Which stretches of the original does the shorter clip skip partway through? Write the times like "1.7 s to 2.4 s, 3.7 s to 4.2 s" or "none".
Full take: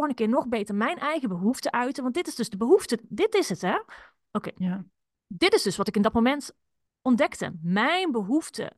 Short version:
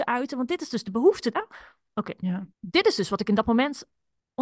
3.0 s to 3.7 s, 4.9 s to 5.2 s